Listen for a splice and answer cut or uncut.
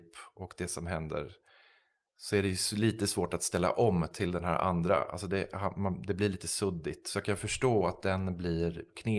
uncut